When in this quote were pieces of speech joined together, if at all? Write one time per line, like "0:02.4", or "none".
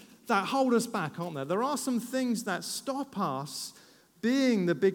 none